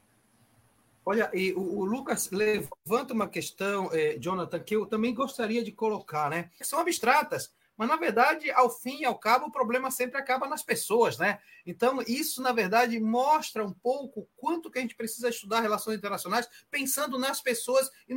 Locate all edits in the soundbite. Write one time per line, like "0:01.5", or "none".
0:06.6